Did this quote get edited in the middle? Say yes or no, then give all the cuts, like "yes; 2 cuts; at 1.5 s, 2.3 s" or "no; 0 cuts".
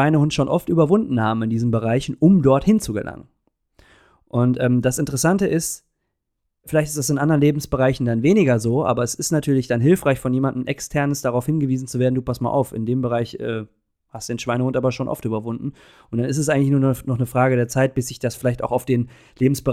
no; 0 cuts